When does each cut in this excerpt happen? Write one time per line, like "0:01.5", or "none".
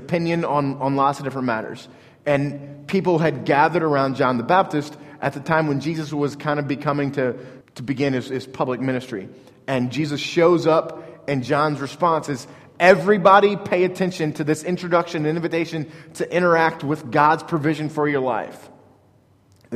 0:07.6